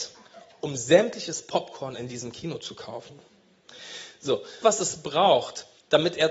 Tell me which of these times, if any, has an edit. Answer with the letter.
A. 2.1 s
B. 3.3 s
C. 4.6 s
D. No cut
C